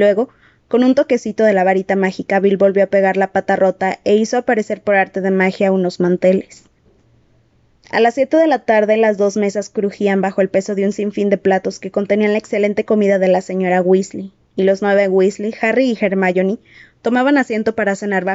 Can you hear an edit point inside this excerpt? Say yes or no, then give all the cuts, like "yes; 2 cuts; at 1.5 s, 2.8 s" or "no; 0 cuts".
no; 0 cuts